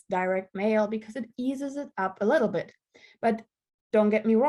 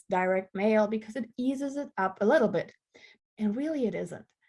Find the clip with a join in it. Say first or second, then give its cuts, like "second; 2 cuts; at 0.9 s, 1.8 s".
second; 1 cut; at 3.2 s